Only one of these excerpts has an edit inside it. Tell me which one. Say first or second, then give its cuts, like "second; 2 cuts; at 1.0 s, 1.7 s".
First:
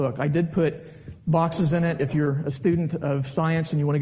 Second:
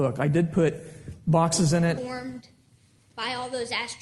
second; 1 cut; at 2.0 s